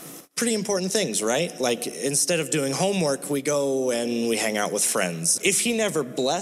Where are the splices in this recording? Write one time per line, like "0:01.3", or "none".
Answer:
0:05.4